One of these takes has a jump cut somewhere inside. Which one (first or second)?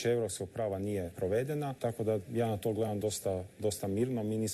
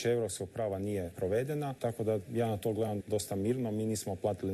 second